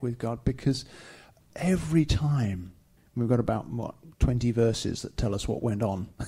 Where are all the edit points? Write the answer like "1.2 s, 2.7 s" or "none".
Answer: 3.0 s

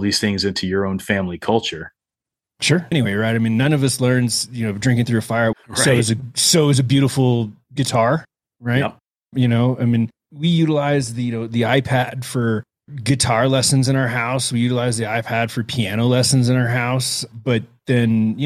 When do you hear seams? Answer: 2.9 s, 5.5 s

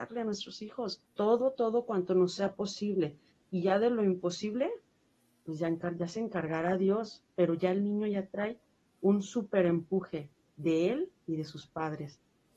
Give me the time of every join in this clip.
1.1 s

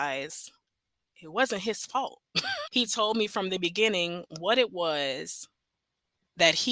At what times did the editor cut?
2.7 s

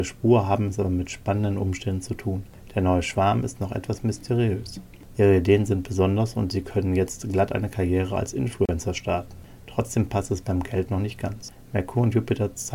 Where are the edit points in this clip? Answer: 5.1 s

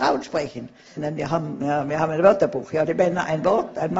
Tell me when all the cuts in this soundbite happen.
1.0 s

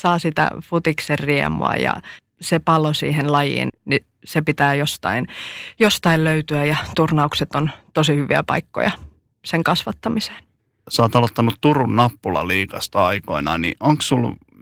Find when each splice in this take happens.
3.7 s

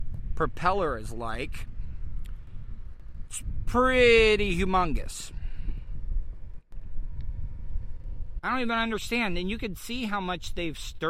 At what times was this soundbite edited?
8.4 s

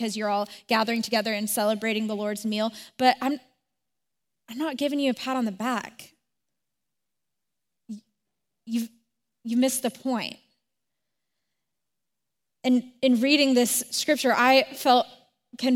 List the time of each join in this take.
none

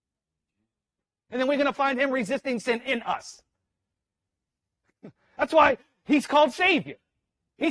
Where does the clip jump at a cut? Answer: 1.3 s

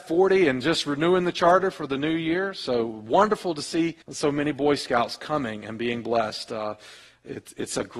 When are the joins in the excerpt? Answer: 4.0 s

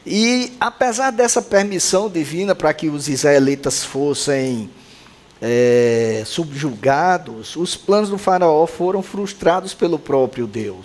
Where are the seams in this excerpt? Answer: none

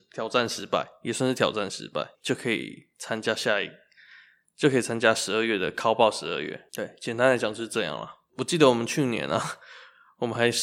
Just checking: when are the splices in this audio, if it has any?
2.1 s

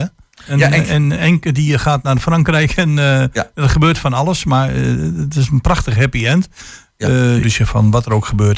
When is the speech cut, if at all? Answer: 7.4 s

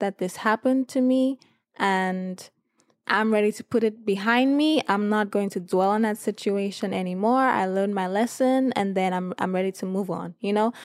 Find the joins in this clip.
none

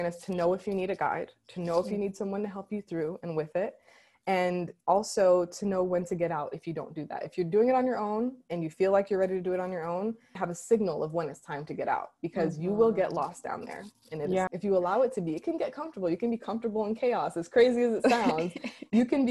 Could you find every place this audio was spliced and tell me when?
10.4 s, 14.5 s

